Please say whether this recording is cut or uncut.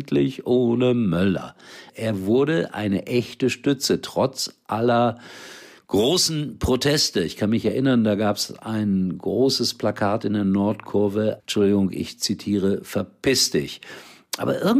cut